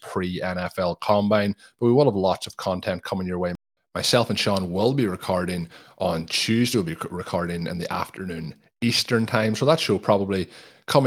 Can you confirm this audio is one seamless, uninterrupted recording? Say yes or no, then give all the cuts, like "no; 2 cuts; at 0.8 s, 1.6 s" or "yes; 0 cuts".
yes; 0 cuts